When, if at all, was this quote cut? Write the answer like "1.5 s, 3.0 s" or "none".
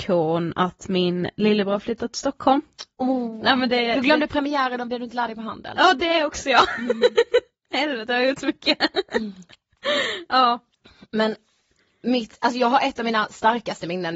none

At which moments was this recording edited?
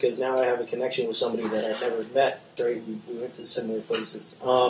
2.6 s

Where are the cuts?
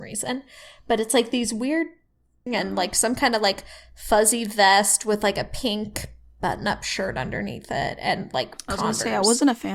2.5 s

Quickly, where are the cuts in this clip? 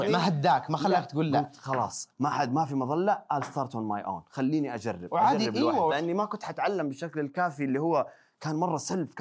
5.9 s

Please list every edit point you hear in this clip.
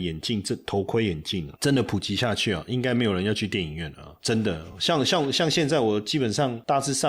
none

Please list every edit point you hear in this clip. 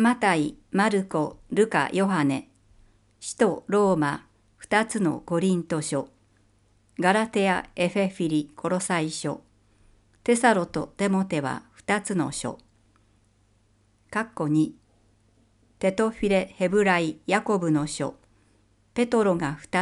none

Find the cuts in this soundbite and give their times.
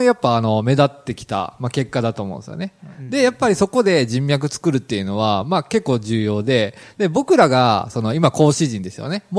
none

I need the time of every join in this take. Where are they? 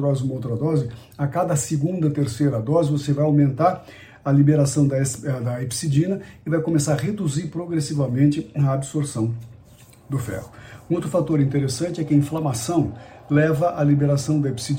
none

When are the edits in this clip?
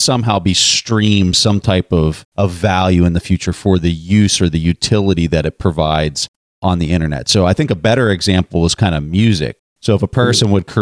none

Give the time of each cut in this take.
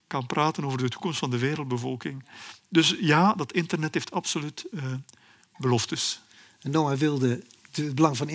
none

